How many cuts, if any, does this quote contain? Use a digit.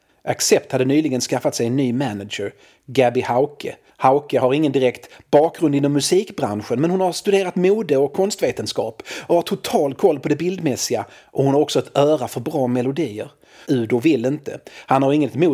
2